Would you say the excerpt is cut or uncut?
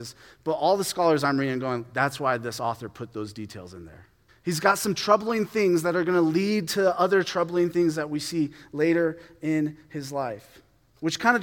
cut